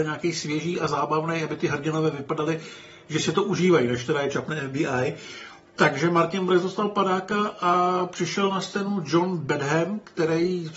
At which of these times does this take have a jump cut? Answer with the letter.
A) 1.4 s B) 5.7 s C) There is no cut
C